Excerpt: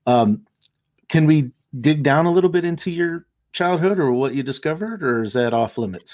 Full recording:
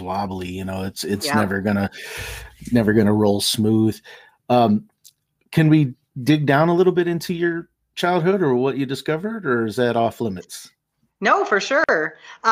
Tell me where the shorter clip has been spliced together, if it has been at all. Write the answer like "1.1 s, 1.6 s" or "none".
none